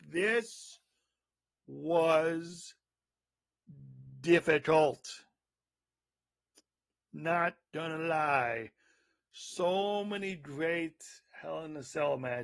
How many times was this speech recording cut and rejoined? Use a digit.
0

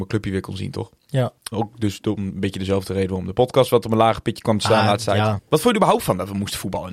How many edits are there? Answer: 2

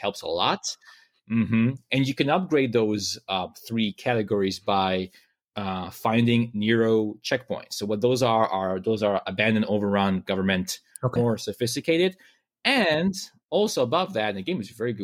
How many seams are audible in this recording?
1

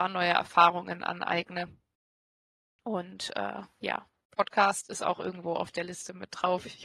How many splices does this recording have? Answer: 0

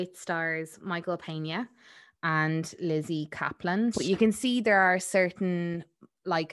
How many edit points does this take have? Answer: 1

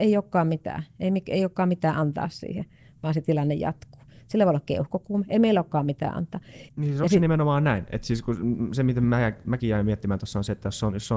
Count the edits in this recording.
1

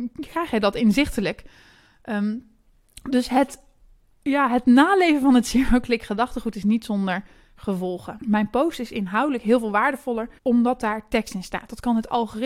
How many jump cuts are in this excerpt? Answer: 2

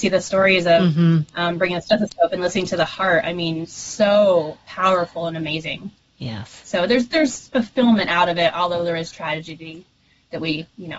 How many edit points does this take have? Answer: 0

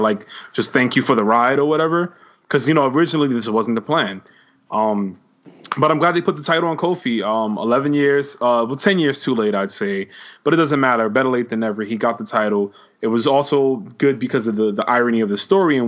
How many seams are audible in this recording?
0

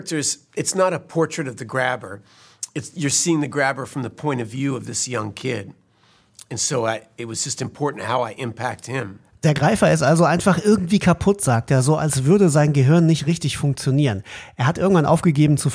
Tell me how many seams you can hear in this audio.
0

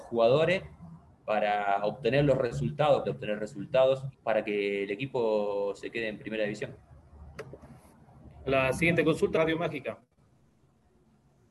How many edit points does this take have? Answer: 3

